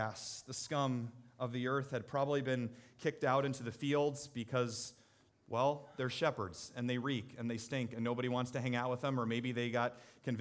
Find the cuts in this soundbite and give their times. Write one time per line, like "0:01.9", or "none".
none